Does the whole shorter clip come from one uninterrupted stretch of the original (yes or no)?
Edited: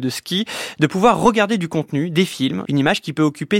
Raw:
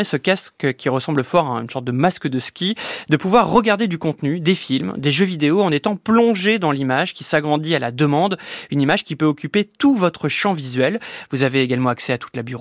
no